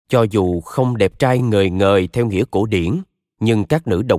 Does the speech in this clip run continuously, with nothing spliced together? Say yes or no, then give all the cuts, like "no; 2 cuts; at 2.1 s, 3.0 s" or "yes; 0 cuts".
yes; 0 cuts